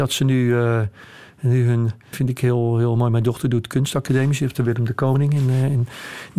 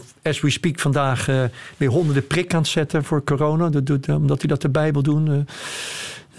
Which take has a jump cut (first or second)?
first